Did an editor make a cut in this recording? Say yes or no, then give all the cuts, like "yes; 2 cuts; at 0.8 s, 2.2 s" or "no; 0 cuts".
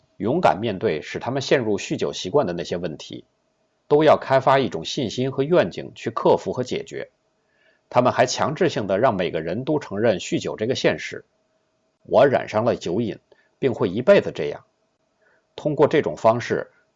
yes; 1 cut; at 3.8 s